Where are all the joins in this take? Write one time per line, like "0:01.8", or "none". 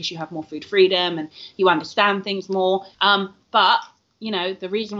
0:02.9